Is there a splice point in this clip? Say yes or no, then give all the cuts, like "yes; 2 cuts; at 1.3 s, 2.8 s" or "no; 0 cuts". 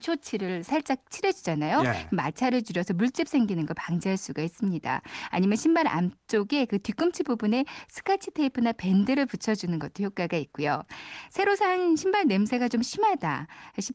no; 0 cuts